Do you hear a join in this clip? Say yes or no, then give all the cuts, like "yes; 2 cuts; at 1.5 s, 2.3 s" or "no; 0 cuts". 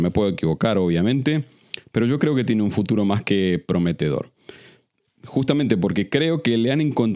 no; 0 cuts